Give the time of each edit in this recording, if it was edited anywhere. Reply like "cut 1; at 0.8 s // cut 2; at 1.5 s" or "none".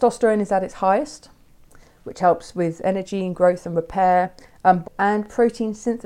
cut 1; at 4.8 s